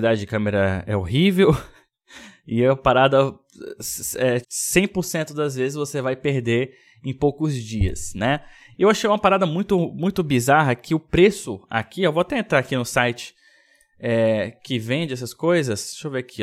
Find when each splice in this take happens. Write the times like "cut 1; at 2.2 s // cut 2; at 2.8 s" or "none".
cut 1; at 4.4 s // cut 2; at 8.7 s

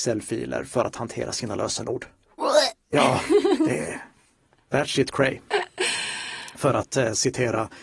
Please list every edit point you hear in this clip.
none

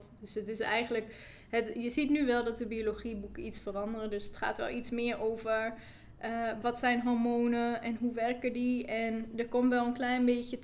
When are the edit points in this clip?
cut 1; at 6.6 s

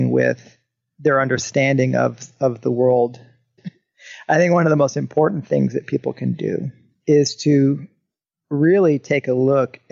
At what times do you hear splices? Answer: cut 1; at 3.6 s

